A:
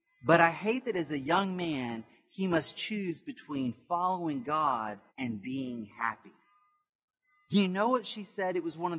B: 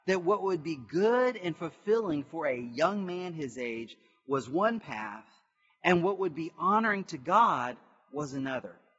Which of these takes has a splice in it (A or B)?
A